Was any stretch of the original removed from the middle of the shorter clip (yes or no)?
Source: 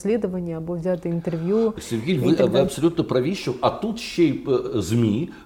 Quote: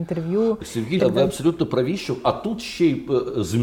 yes